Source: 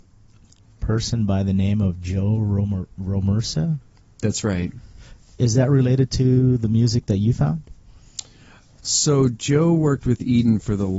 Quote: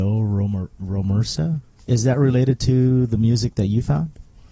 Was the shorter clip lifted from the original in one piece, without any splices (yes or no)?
no